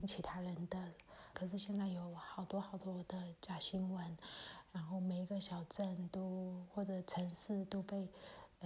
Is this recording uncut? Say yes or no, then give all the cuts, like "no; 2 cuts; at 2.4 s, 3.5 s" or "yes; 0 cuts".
no; 1 cut; at 1.3 s